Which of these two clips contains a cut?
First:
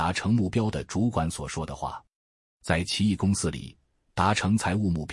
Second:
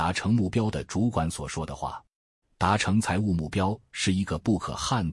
second; 1 cut; at 2.4 s

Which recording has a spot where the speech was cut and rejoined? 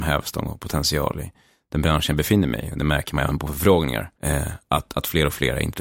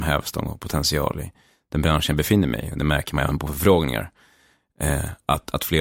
first; 1 cut; at 4.1 s

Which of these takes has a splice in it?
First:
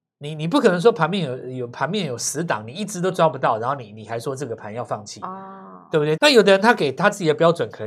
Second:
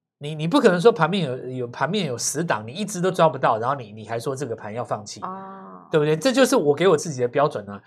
first; 1 cut; at 6.2 s

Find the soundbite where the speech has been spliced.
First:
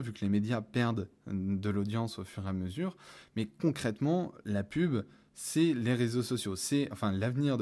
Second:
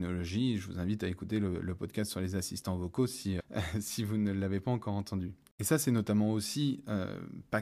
second; 1 cut; at 3.4 s

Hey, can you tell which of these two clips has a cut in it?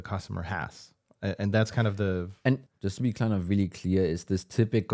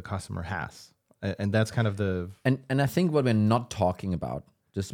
first; 1 cut; at 2.7 s

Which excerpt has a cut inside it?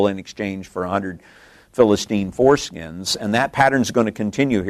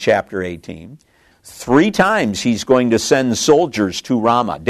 second; 1 cut; at 1.3 s

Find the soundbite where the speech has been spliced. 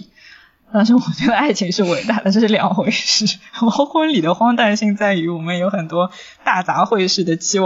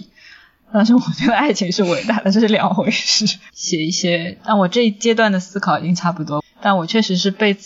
second; 2 cuts; at 3.5 s, 6.4 s

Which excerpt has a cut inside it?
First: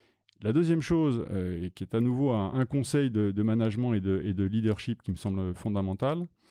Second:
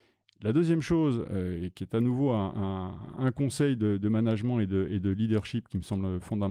first; 1 cut; at 2.5 s

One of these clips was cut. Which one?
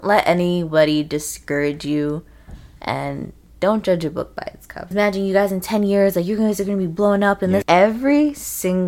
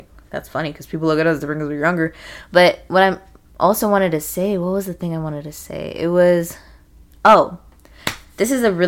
first; 2 cuts; at 4.9 s, 7.6 s

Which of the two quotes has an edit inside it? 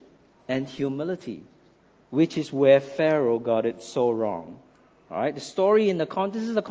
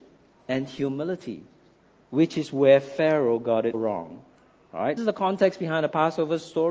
second; 2 cuts; at 3.7 s, 5.0 s

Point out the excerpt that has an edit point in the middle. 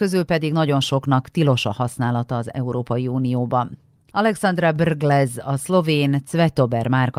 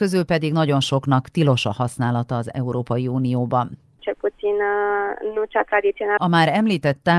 second; 2 cuts; at 4.0 s, 6.2 s

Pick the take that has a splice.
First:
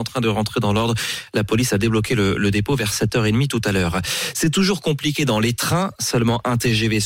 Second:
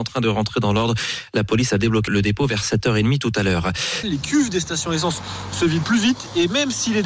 second; 3 cuts; at 2.1 s, 4.0 s, 5.8 s

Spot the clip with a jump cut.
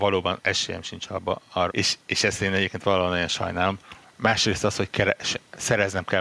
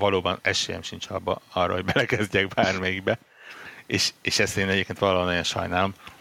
first; 1 cut; at 1.7 s

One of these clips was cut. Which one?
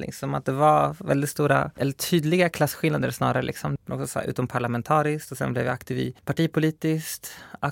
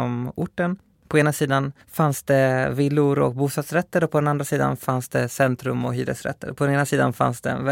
first; 1 cut; at 3.8 s

